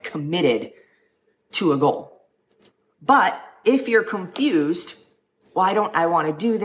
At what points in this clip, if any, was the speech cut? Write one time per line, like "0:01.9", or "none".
0:02.9